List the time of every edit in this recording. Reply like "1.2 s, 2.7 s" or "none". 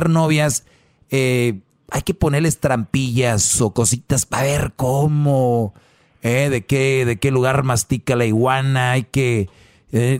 none